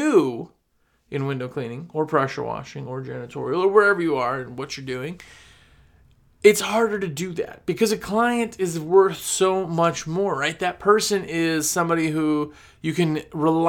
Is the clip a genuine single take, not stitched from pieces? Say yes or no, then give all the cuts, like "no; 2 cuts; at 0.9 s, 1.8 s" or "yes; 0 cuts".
yes; 0 cuts